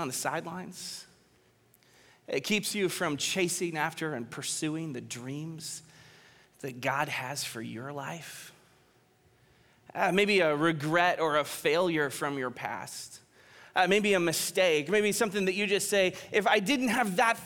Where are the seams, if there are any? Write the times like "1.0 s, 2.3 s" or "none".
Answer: none

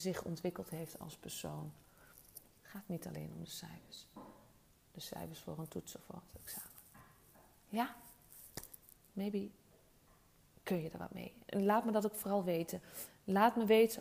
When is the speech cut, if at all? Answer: 2.5 s, 9.1 s

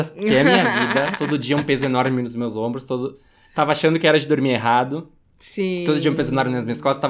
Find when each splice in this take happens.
none

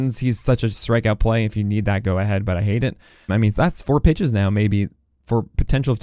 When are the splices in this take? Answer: 3.3 s

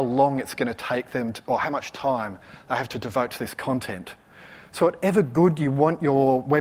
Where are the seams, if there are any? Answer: none

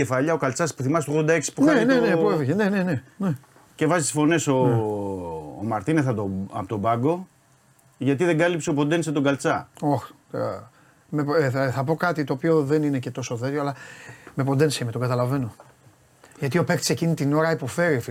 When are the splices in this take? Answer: none

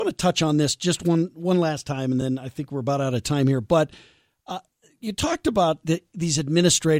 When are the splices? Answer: none

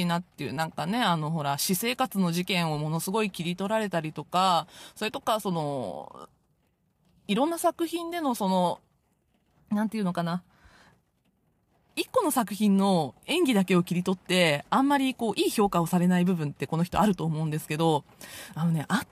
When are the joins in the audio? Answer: none

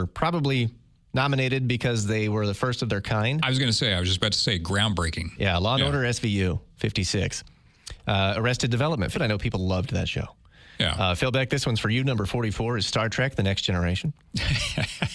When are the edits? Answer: 9.1 s

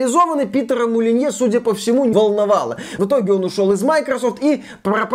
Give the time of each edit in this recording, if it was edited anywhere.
2.1 s

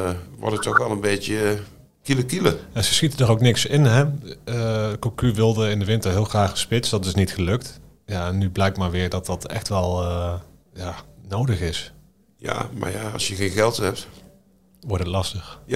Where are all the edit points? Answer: none

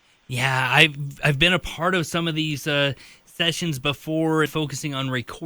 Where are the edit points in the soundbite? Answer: 4.5 s

